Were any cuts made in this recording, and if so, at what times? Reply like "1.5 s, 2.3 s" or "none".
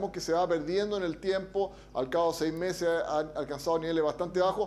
none

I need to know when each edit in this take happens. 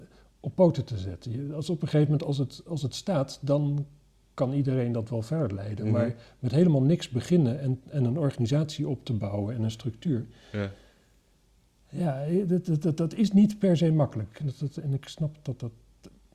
none

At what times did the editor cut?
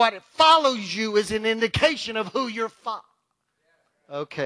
none

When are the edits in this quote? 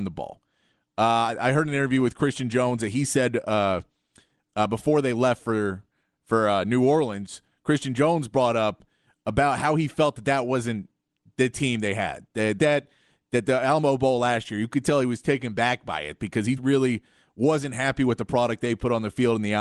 12.6 s, 16.6 s

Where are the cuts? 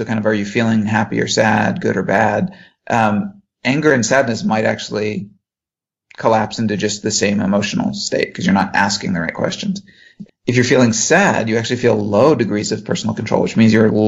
10.3 s

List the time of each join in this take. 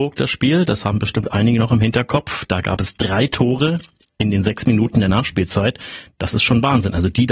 none

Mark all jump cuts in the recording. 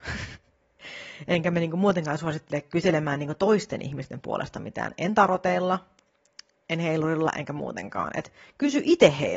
none

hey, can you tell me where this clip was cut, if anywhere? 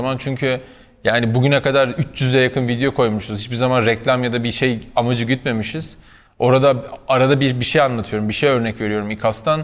none

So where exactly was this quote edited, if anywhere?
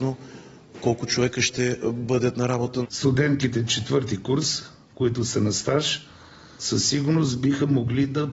2.9 s, 6.6 s

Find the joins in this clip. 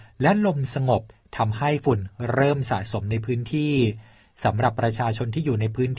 none

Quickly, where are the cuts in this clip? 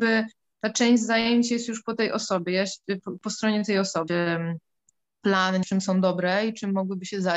4.1 s, 5.6 s

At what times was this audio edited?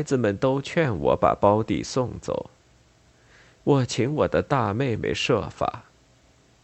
none

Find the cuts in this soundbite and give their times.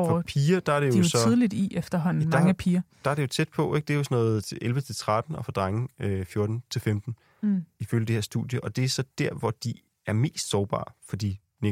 none

